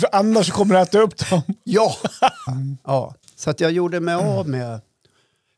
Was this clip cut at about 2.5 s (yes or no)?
yes